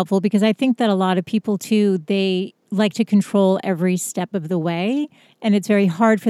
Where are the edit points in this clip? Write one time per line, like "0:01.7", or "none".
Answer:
0:02.6

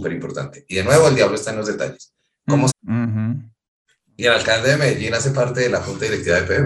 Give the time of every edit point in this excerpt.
0:02.7

